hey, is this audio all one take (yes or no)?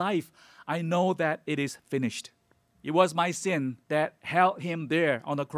no